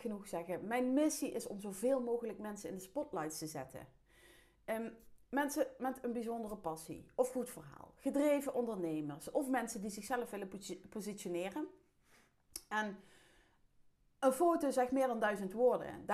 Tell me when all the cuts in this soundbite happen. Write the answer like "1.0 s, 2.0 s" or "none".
none